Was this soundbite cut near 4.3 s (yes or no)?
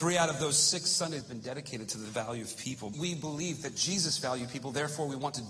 no